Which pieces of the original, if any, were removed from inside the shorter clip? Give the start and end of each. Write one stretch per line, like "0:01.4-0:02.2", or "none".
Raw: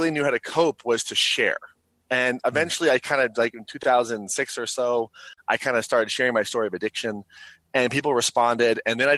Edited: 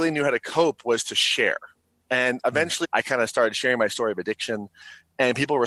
0:02.8-0:05.4